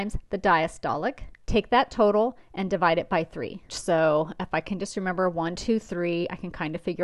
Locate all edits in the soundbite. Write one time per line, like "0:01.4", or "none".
0:01.4
0:03.7